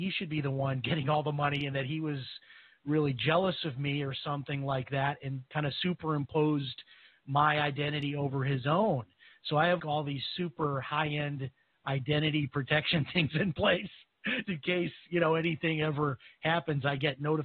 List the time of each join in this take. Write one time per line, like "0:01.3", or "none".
0:09.8
0:14.4